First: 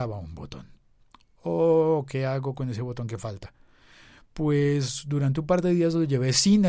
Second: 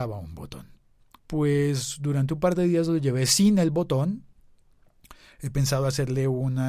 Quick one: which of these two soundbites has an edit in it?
second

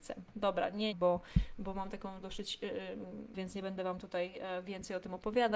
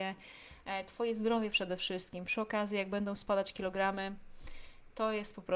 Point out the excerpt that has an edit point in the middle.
first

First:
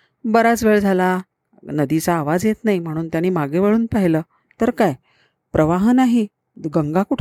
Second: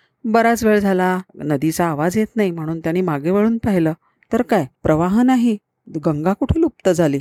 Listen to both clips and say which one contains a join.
second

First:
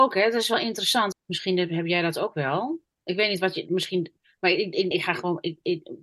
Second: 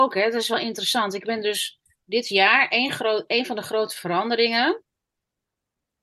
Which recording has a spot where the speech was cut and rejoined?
first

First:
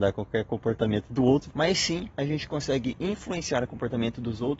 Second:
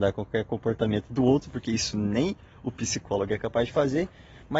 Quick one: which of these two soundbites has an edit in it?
first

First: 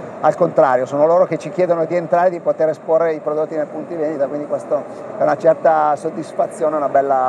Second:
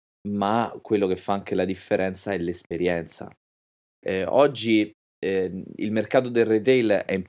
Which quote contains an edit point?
second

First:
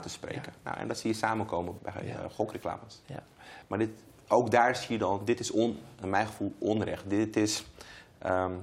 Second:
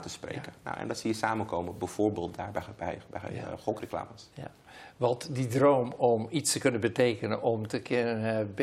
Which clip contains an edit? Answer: first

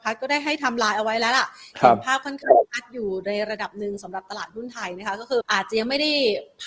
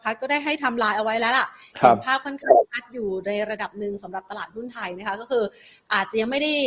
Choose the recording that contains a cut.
first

